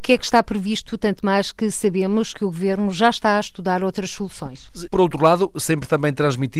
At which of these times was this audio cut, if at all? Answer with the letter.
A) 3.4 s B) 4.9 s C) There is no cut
B